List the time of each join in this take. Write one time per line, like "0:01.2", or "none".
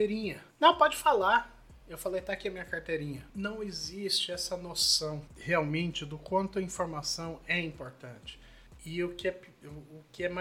0:03.3